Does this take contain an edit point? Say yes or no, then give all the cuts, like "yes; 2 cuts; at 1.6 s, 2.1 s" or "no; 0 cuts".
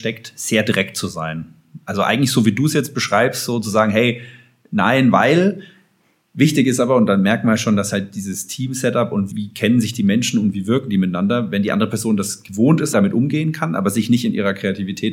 yes; 2 cuts; at 9.3 s, 12.9 s